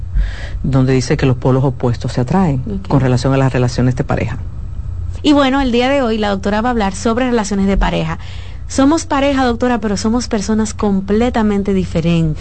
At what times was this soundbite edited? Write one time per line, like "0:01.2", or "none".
0:05.2